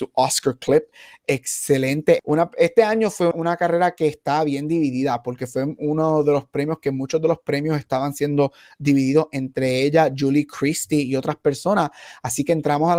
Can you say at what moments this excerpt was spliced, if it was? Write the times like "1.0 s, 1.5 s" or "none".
2.2 s, 3.3 s

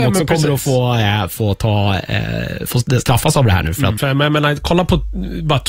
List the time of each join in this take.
4.0 s

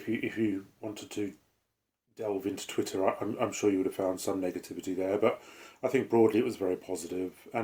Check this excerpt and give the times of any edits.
none

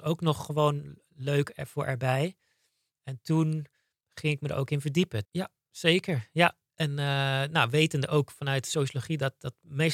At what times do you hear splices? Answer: 5.3 s

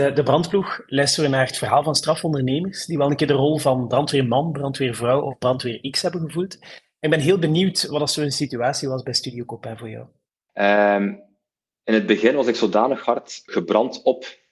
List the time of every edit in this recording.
10.5 s, 13.5 s

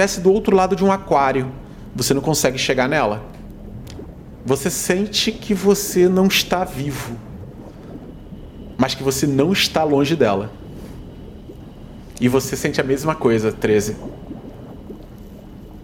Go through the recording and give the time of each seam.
none

